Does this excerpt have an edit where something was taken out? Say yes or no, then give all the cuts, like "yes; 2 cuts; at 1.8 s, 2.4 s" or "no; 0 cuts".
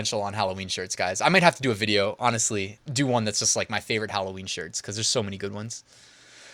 yes; 1 cut; at 2.8 s